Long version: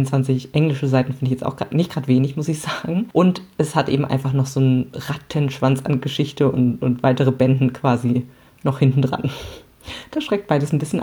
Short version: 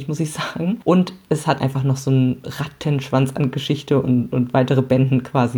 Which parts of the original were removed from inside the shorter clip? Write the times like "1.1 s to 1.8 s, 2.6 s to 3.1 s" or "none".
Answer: 3.9 s to 4.1 s